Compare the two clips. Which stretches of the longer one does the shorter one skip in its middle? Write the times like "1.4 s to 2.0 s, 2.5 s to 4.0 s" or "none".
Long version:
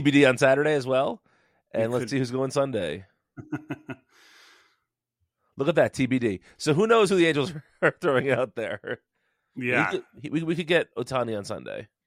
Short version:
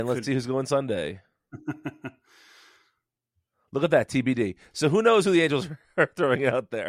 none

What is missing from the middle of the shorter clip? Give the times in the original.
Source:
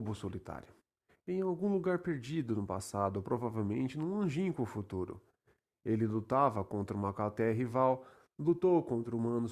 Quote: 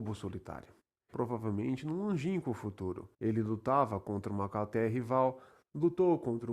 1.1 s to 3.2 s, 5.3 s to 5.8 s

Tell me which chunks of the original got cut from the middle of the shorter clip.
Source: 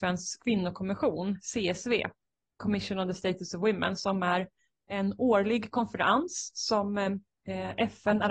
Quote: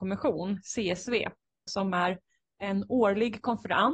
2.5 s to 4.0 s

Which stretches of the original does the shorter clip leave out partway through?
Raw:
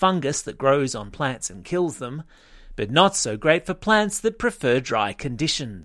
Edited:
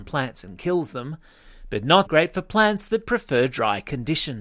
3.1 s to 3.4 s

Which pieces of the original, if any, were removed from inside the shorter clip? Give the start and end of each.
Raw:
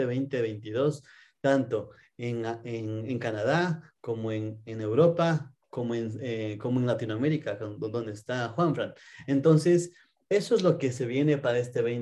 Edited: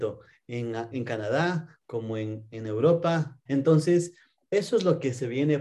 2.6 s to 3.1 s, 5.6 s to 9.2 s

